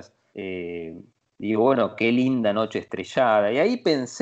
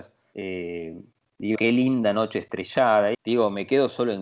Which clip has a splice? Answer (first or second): second